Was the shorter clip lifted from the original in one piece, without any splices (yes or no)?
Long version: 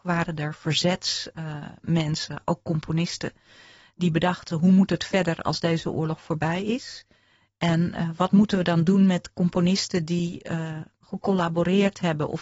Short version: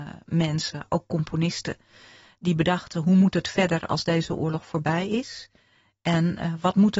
yes